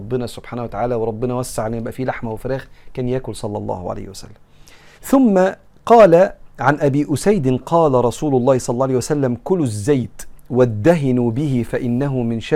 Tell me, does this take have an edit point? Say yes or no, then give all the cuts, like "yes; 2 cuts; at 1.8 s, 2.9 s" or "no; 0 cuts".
yes; 2 cuts; at 5.0 s, 7.6 s